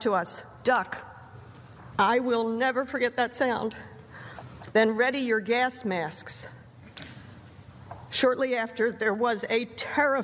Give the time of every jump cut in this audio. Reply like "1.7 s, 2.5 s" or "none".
1.9 s, 4.7 s

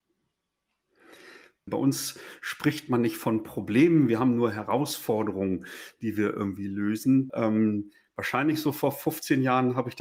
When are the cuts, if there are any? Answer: 1.7 s, 7.3 s

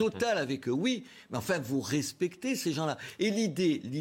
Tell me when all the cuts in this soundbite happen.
none

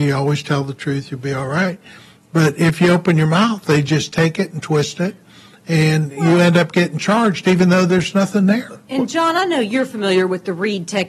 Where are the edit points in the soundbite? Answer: none

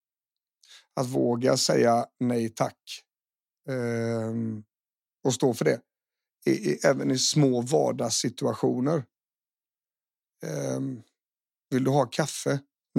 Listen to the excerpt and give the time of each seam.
none

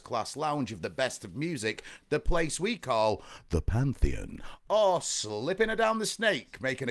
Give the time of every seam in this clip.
none

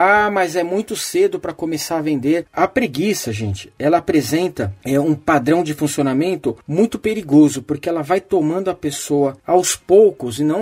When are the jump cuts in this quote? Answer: 2.5 s

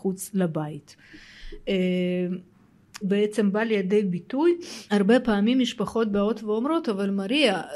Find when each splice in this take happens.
3.0 s, 4.9 s

